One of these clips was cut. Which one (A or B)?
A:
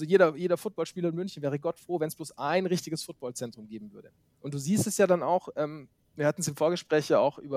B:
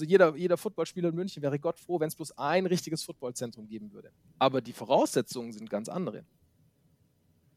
B